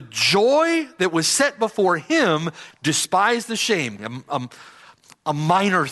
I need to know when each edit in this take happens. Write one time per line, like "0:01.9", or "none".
0:02.7
0:04.0